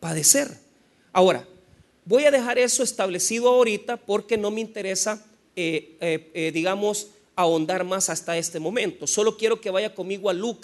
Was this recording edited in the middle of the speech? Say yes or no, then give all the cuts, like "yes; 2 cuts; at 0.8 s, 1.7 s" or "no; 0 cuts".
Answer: no; 0 cuts